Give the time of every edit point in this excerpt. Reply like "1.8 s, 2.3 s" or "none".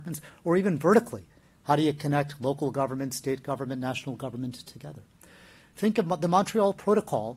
5.7 s